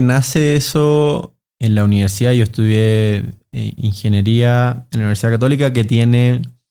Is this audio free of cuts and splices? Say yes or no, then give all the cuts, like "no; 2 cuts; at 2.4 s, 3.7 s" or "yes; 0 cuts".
yes; 0 cuts